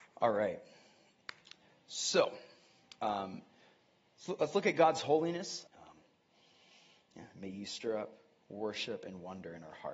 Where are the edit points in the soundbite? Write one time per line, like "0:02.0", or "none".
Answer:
0:05.7